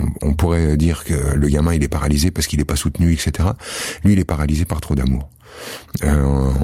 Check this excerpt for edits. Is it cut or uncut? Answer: cut